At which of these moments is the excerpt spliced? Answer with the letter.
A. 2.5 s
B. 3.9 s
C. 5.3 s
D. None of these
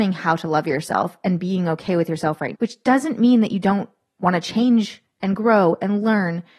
A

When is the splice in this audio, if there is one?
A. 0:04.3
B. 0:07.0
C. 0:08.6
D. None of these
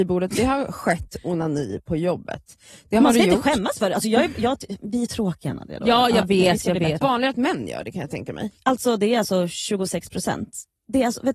B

